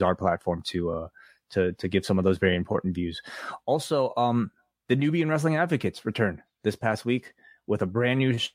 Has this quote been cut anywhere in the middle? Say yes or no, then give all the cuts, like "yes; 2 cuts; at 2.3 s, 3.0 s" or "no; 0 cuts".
no; 0 cuts